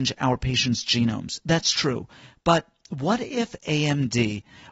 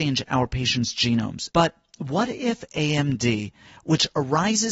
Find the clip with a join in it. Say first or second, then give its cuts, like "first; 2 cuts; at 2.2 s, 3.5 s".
second; 1 cut; at 1.5 s